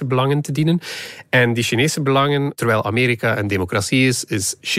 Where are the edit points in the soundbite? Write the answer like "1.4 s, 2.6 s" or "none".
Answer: none